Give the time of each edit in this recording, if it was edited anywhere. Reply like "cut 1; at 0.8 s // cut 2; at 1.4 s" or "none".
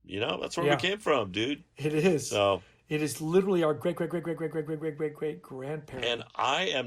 none